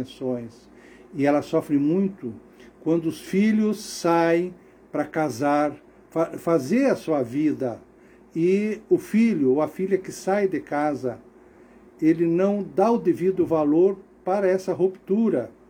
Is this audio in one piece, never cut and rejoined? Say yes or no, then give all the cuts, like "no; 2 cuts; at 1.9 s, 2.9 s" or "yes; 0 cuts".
no; 1 cut; at 8.2 s